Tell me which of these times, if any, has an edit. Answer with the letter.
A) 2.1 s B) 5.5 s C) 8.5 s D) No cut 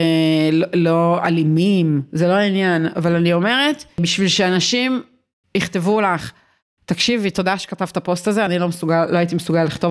D